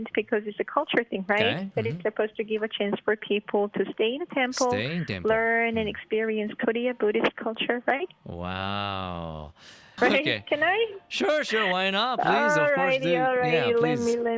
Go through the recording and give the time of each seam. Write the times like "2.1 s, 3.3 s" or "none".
10.0 s